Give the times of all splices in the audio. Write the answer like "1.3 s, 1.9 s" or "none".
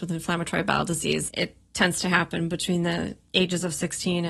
1.3 s